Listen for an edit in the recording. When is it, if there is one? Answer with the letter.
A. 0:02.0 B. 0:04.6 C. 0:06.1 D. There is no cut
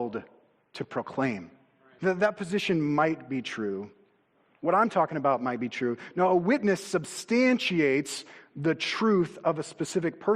A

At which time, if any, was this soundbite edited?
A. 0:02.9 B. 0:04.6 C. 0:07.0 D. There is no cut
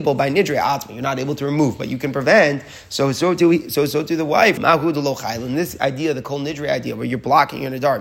B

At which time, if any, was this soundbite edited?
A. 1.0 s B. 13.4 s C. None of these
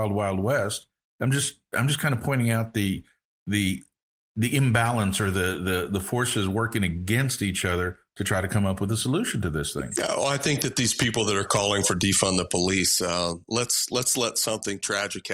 C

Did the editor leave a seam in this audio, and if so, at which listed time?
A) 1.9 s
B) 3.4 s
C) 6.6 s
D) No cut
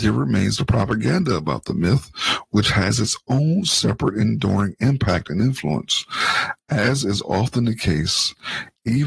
D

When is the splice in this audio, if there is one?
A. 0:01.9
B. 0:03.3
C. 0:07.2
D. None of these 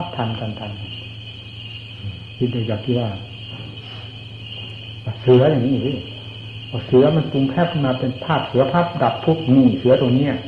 D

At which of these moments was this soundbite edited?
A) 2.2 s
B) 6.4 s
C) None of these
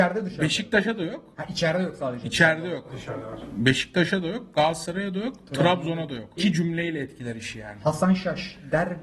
B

